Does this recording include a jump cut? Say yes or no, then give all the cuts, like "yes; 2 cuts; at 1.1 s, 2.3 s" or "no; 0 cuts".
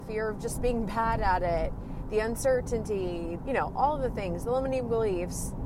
yes; 1 cut; at 3.4 s